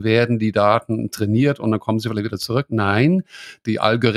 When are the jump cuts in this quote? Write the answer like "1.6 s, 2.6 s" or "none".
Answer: none